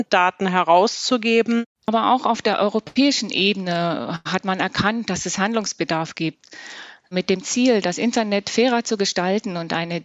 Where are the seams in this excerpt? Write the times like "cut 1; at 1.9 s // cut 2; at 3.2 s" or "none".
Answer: cut 1; at 1.8 s

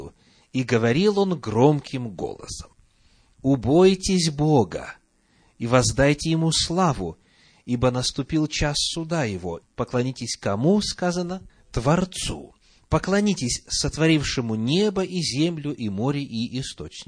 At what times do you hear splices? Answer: cut 1; at 9.6 s

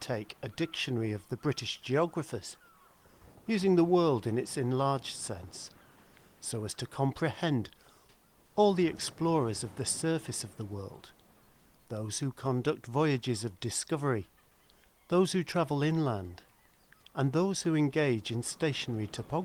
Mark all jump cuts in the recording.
none

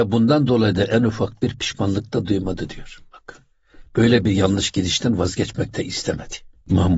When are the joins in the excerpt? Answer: none

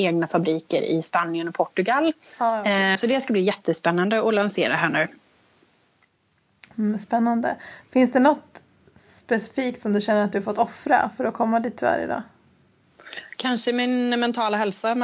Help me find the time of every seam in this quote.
cut 1; at 3.0 s

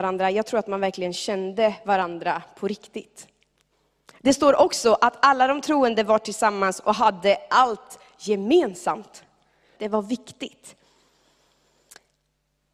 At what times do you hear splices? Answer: cut 1; at 9.8 s

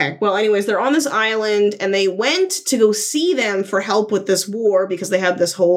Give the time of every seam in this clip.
none

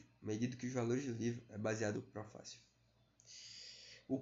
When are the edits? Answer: cut 1; at 1.9 s

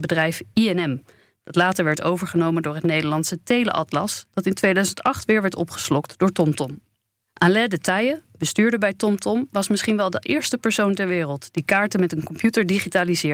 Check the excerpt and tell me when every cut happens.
cut 1; at 7.3 s

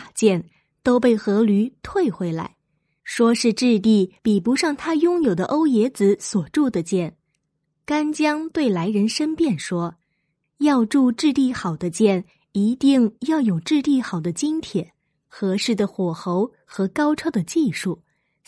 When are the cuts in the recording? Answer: none

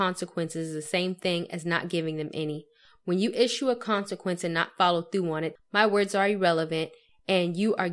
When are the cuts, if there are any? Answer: cut 1; at 5.6 s

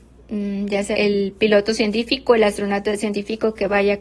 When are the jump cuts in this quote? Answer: cut 1; at 0.9 s

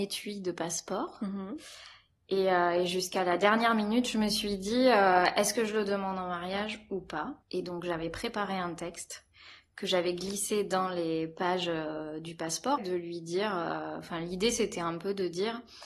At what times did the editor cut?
cut 1; at 7.4 s // cut 2; at 12.8 s

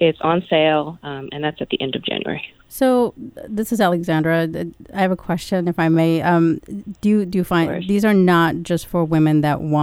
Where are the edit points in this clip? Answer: none

